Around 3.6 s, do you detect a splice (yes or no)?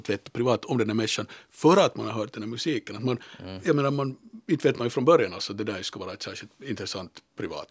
no